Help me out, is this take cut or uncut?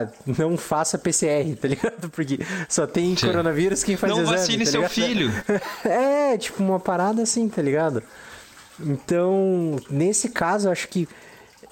uncut